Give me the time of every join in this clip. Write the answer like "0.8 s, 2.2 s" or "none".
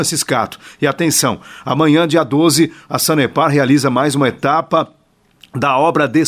none

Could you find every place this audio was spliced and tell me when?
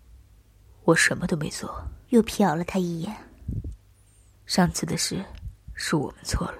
2.0 s, 4.3 s

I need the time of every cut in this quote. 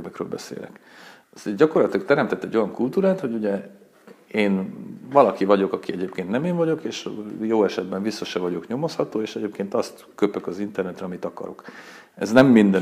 none

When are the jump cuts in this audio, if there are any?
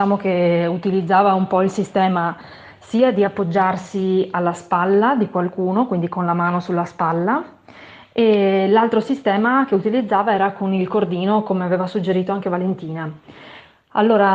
none

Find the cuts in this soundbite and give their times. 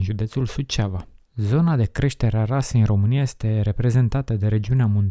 1.2 s

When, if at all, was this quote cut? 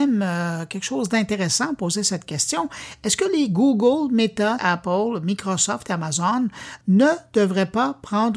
4.6 s

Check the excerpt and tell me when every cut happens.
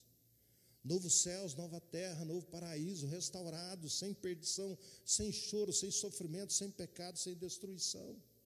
none

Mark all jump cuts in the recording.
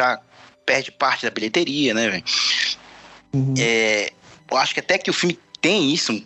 none

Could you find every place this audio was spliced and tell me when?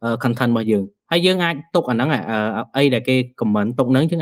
none

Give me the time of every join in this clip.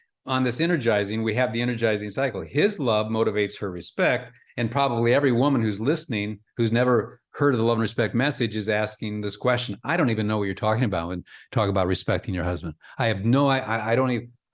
4.5 s

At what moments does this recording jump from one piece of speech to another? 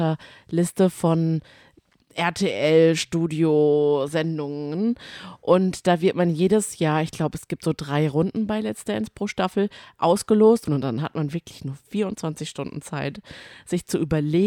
10.7 s

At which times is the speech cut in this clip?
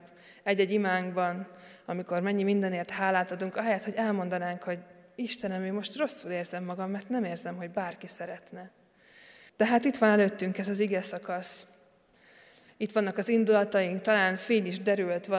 9.5 s

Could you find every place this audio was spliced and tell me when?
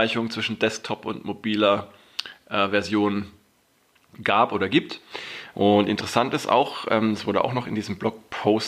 5.5 s

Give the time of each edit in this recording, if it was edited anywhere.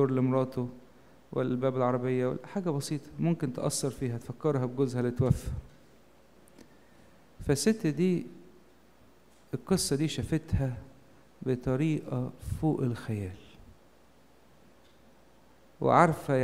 none

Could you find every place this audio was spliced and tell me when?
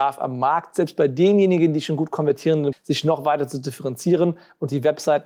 2.7 s

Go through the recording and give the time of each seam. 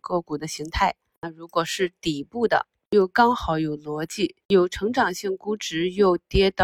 none

